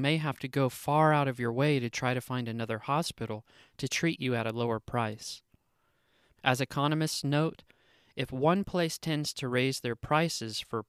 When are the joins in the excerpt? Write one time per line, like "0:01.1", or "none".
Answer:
0:06.4